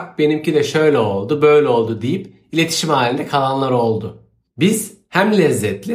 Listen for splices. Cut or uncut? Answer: uncut